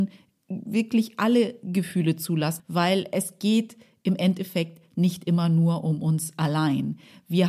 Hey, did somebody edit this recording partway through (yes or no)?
yes